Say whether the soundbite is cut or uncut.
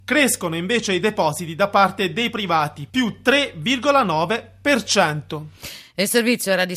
uncut